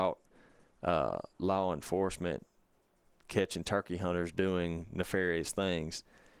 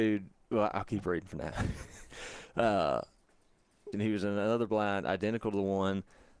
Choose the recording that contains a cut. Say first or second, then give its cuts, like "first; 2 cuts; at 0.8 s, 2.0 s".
second; 1 cut; at 3.9 s